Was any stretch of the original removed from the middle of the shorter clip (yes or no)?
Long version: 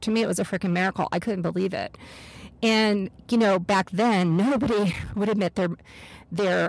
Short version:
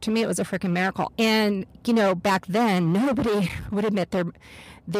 yes